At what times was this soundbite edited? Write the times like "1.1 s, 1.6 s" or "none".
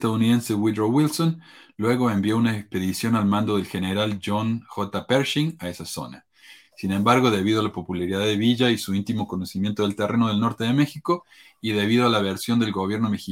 none